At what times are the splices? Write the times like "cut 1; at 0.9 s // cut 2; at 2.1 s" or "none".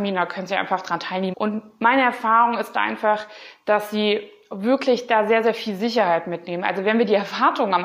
cut 1; at 1.3 s